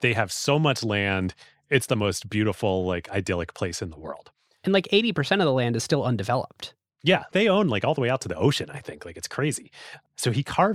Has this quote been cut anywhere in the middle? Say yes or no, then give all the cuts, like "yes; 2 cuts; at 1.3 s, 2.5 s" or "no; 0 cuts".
no; 0 cuts